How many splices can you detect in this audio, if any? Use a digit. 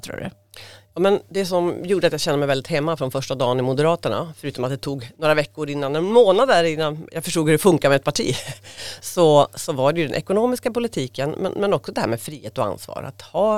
0